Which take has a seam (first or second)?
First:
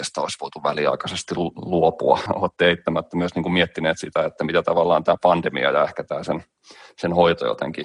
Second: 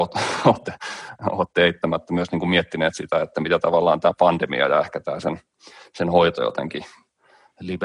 first